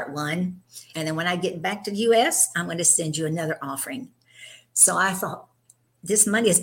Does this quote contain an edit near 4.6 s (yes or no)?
no